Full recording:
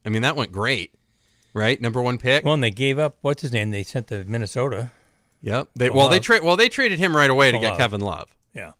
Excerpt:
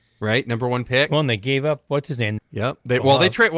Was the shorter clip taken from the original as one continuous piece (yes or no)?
no